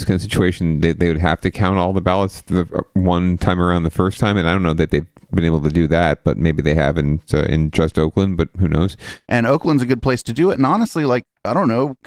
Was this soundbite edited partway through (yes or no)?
yes